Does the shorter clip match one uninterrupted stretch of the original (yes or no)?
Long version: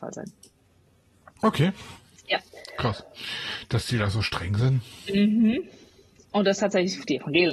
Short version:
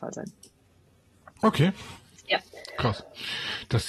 yes